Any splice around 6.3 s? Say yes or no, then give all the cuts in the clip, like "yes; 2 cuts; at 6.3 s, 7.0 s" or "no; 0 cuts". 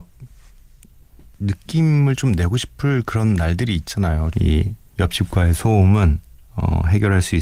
no; 1 cut; at 4.3 s